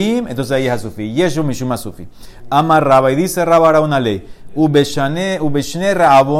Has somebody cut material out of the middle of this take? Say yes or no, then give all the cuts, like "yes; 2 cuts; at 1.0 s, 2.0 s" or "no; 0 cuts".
no; 0 cuts